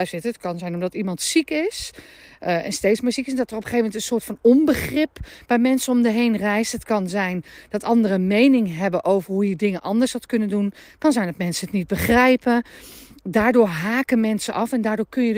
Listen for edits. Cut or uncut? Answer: uncut